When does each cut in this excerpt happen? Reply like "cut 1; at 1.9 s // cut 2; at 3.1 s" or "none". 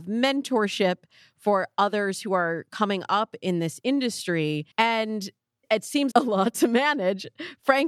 cut 1; at 4.7 s // cut 2; at 6.1 s